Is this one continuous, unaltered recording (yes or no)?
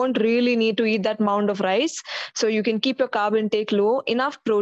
yes